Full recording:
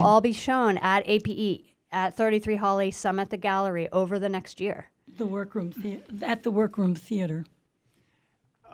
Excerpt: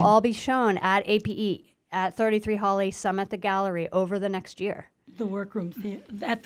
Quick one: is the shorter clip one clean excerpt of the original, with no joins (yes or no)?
yes